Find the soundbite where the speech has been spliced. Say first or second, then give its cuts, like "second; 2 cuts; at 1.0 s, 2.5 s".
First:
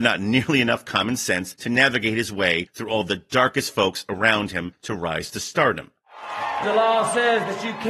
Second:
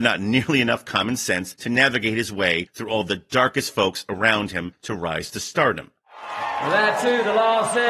first; 1 cut; at 6.6 s